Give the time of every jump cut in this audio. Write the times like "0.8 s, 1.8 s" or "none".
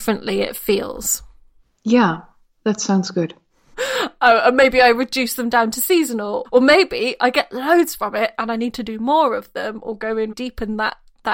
3.7 s, 6.4 s, 10.3 s

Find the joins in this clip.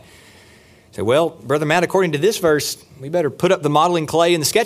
none

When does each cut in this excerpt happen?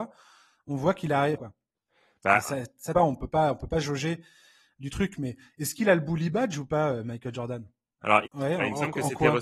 1.4 s, 3.0 s, 8.3 s

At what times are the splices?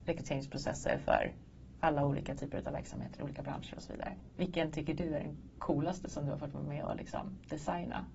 4.2 s

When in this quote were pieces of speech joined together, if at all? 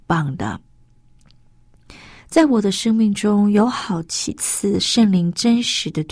2.2 s

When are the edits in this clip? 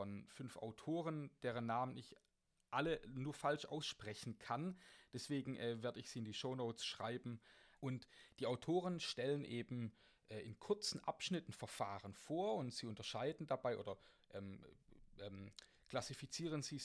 7.8 s

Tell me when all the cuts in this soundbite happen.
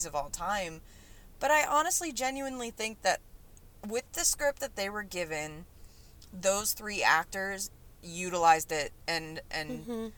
none

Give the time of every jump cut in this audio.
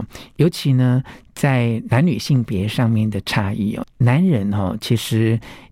3.8 s

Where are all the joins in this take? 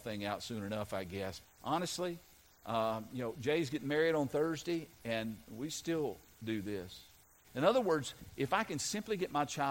1.4 s, 7.4 s

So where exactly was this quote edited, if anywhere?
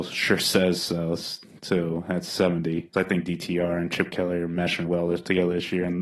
2.9 s, 4.9 s

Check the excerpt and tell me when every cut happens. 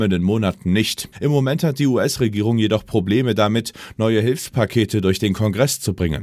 1.1 s

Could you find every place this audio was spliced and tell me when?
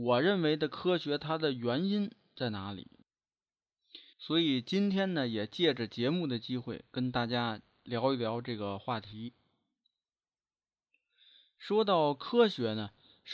4.1 s

